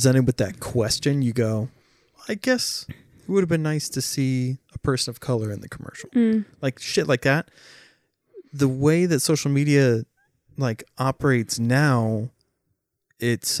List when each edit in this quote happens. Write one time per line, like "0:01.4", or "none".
none